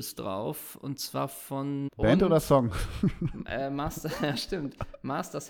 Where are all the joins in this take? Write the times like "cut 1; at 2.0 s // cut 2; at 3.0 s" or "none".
cut 1; at 1.9 s

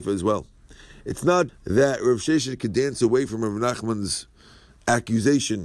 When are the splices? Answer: cut 1; at 1.5 s

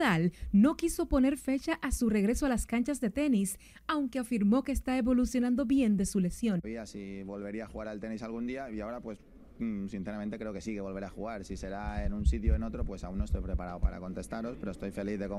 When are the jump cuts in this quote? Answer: cut 1; at 13.8 s

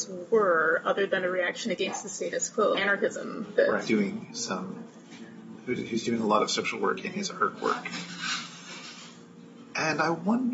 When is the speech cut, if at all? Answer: cut 1; at 2.7 s // cut 2; at 3.9 s

